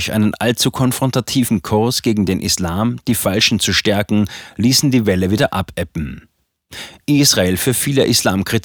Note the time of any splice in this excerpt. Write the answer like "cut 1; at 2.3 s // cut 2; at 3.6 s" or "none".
none